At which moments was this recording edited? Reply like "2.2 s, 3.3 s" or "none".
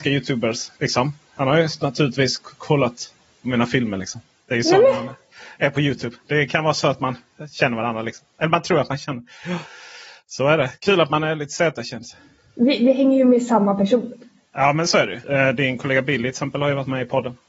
15.2 s